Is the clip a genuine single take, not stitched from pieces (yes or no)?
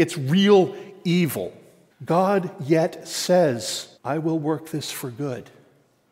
no